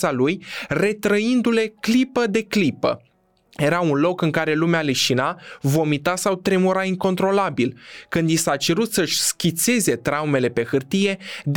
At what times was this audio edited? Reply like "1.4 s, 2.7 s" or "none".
none